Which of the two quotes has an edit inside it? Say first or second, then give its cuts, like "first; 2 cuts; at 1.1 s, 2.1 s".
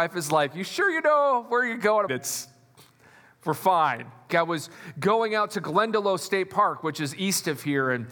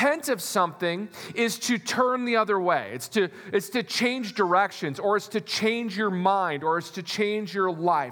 first; 2 cuts; at 2.1 s, 4.3 s